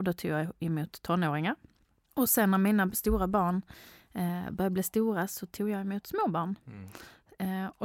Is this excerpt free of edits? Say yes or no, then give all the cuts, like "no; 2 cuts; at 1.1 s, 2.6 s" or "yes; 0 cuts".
yes; 0 cuts